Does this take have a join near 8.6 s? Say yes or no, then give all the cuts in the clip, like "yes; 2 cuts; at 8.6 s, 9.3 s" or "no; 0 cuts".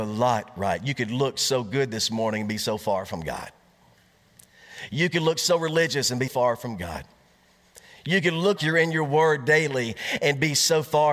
yes; 2 cuts; at 6.3 s, 8.6 s